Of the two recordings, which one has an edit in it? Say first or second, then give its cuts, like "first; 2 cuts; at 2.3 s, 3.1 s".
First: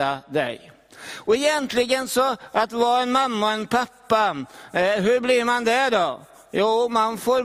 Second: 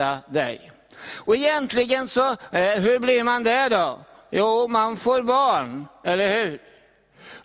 second; 1 cut; at 2.5 s